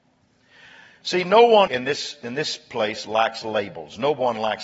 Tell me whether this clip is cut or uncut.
cut